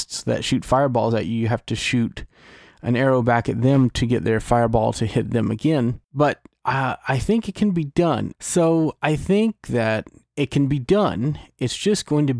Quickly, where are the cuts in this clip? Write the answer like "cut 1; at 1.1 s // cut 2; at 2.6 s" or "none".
cut 1; at 8.3 s